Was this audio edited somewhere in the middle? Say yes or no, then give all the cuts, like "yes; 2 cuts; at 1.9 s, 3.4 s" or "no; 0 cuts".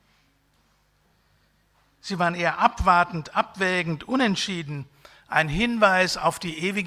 no; 0 cuts